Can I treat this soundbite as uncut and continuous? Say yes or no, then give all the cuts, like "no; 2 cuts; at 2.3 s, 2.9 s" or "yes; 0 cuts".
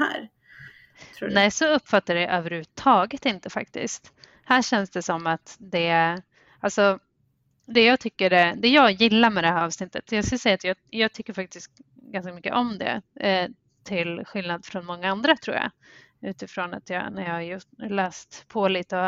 yes; 0 cuts